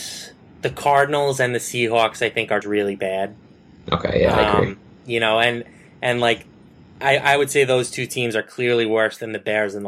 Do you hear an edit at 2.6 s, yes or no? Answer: yes